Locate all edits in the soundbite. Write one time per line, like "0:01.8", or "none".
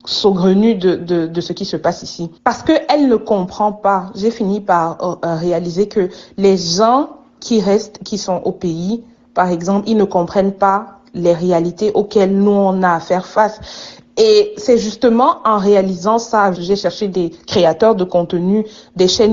0:02.4
0:16.5